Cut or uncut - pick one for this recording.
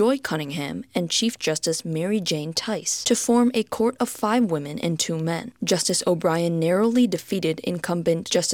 uncut